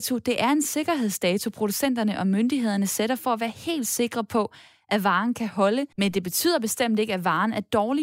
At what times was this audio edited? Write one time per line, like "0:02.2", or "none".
0:05.9

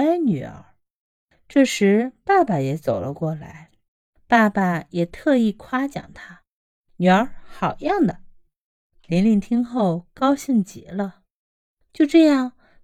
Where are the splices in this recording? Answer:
0:03.9

